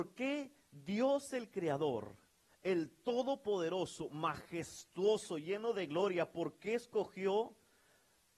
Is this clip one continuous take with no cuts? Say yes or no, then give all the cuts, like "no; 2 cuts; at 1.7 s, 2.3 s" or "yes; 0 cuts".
yes; 0 cuts